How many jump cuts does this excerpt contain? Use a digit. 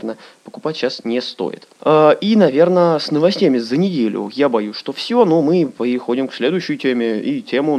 1